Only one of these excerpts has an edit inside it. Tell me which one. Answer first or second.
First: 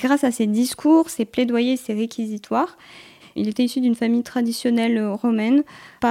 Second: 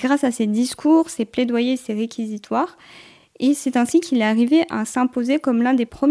first